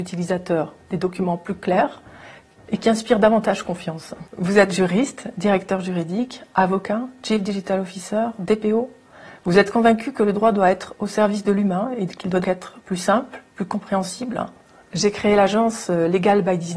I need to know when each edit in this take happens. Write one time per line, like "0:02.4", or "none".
0:12.4
0:14.9